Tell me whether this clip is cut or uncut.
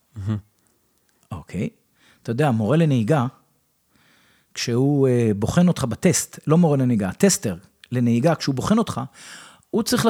uncut